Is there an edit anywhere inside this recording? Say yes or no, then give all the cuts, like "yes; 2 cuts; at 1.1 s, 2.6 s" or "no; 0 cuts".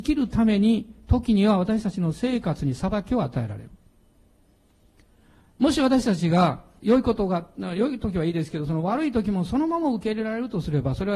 yes; 1 cut; at 6.8 s